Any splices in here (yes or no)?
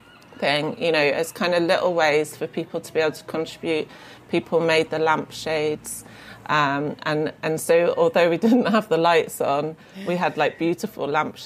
no